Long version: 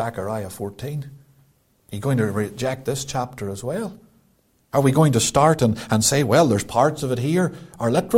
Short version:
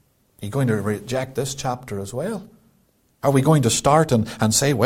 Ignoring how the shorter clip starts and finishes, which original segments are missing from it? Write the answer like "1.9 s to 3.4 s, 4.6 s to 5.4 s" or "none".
none

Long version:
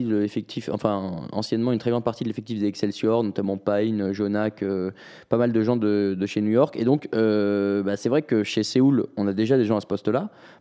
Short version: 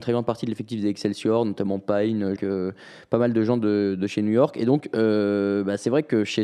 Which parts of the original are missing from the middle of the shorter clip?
4.1 s to 4.6 s

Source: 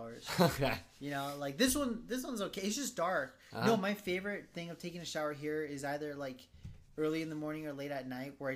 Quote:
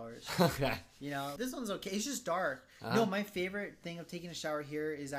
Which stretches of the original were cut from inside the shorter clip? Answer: 1.4 s to 2.1 s

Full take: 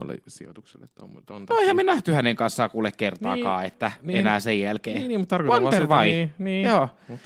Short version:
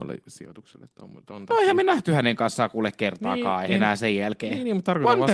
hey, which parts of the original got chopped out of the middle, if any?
3.7 s to 4.1 s

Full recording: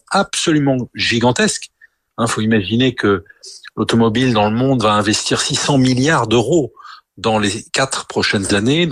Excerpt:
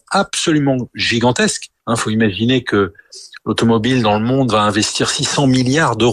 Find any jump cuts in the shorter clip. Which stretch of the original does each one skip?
1.8 s to 2.1 s

